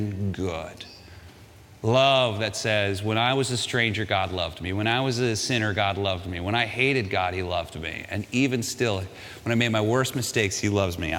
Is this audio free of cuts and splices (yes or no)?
yes